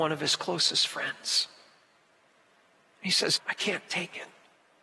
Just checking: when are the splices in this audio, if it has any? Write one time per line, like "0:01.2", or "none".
0:03.4